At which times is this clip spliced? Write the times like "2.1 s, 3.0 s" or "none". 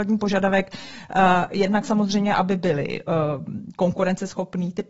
none